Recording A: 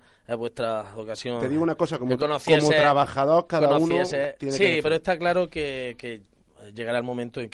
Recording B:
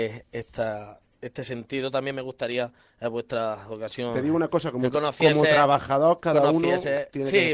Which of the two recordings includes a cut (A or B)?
A